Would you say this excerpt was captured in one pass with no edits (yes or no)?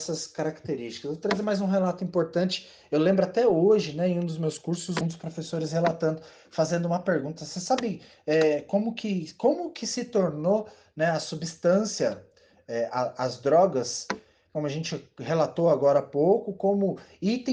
no